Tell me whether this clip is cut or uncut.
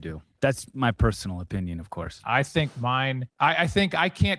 cut